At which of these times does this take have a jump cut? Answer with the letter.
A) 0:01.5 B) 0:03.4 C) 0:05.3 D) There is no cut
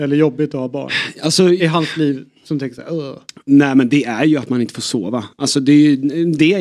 D